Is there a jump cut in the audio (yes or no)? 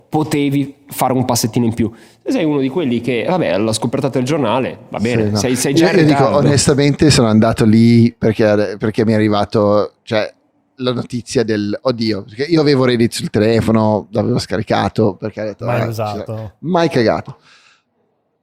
no